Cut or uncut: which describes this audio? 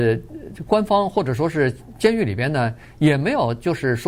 uncut